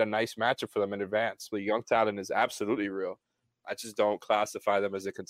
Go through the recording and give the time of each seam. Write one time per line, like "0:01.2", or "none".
0:01.5